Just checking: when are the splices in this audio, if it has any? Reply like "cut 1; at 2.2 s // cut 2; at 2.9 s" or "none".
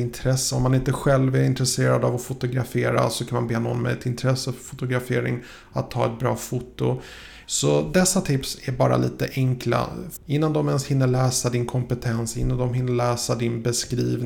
cut 1; at 7.4 s // cut 2; at 10.2 s